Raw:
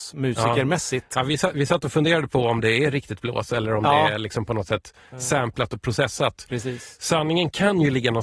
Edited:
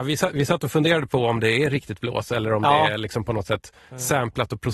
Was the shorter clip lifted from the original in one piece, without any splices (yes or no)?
yes